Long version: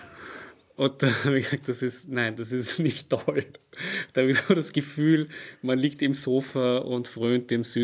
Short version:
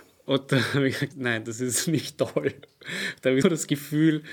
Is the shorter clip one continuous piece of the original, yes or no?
no